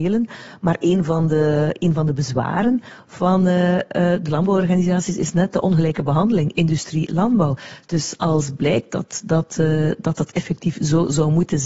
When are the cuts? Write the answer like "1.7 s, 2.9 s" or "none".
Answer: none